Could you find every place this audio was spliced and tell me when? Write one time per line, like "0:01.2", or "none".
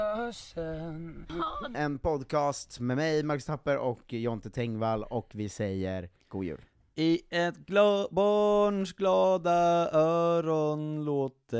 0:01.7
0:06.2